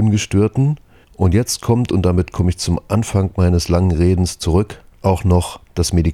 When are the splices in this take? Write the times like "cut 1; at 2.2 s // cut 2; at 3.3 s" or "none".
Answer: none